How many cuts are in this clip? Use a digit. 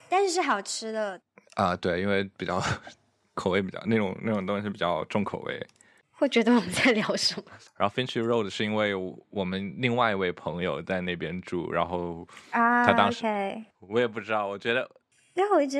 3